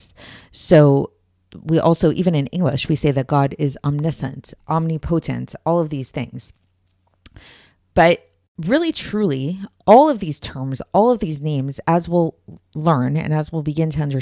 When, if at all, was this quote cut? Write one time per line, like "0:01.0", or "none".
0:04.6